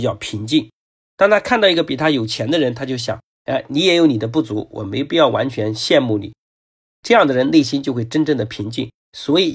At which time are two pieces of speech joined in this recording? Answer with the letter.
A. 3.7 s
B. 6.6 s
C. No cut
B